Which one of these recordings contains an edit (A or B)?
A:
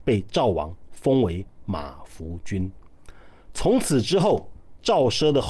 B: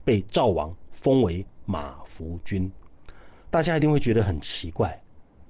B